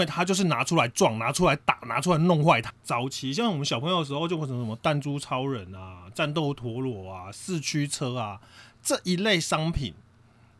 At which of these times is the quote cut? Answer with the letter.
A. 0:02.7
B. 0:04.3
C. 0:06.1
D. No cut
A